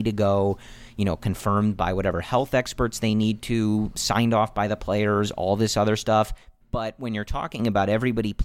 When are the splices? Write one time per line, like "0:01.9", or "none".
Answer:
0:06.6